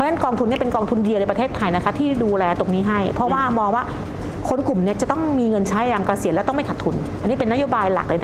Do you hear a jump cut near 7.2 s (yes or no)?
yes